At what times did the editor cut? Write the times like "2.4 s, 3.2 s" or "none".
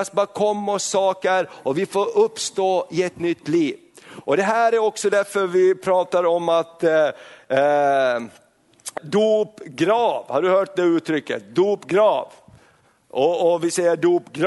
9.0 s